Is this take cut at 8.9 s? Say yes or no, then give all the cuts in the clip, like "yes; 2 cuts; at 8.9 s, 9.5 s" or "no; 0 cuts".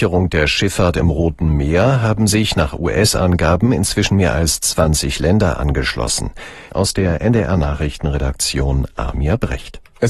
no; 1 cut; at 6.7 s